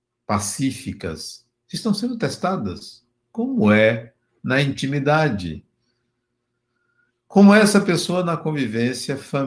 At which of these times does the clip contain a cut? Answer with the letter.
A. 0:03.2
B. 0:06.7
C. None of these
C